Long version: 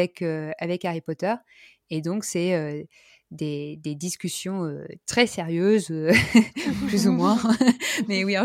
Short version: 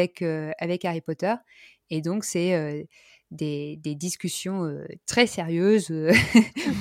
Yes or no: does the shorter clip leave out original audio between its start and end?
no